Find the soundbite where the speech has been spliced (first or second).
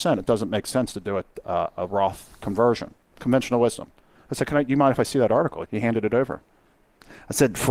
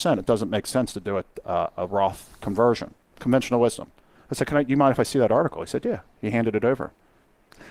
first